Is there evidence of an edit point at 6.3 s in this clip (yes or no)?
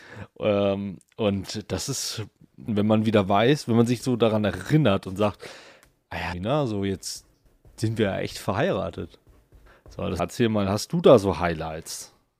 yes